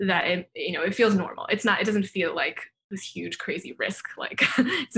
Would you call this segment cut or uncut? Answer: uncut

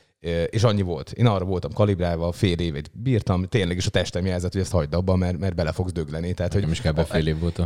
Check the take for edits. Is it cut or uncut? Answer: uncut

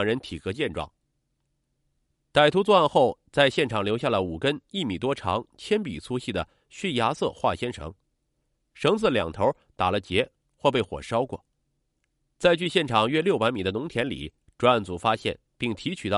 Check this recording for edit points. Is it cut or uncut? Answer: uncut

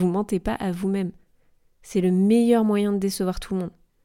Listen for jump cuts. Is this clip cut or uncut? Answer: uncut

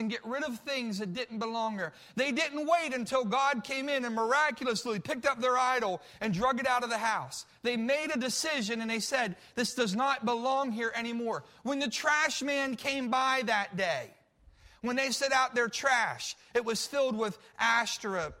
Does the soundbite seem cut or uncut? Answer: uncut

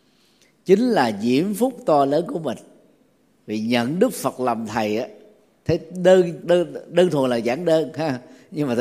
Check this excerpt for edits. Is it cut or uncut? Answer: cut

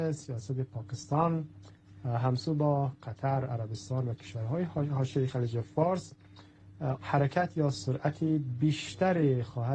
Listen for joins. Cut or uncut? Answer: cut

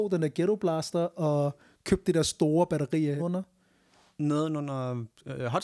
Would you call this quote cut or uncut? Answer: cut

